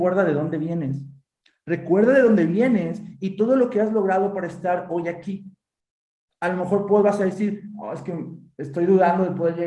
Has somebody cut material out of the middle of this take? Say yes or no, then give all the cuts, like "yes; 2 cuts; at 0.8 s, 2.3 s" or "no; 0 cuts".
no; 0 cuts